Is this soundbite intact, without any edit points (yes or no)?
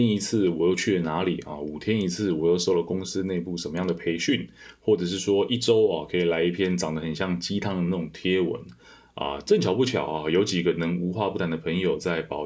yes